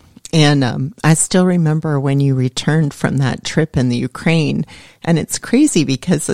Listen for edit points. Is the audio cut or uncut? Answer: uncut